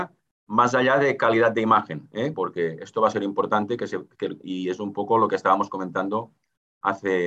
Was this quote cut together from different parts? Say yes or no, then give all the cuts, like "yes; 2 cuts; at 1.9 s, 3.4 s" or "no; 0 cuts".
no; 0 cuts